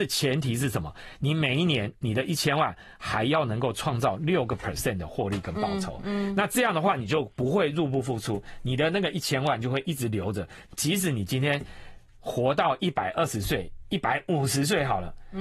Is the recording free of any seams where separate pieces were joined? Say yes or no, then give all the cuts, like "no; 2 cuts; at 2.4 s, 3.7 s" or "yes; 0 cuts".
yes; 0 cuts